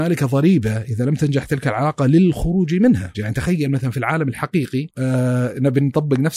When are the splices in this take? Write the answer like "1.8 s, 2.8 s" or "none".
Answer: 3.1 s, 4.9 s